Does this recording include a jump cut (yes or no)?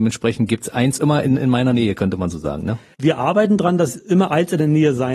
no